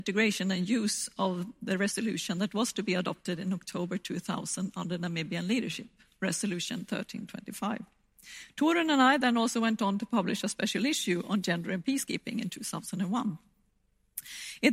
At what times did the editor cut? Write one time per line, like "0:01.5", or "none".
none